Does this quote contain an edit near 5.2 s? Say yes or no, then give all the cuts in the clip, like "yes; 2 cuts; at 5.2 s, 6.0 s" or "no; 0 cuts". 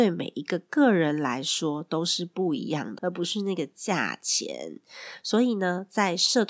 no; 1 cut; at 3.0 s